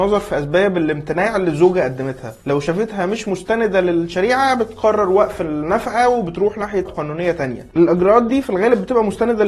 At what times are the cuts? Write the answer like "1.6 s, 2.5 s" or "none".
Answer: 6.9 s